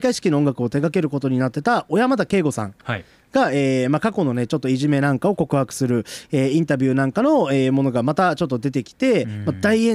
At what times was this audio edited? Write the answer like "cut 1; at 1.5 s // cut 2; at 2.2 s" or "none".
none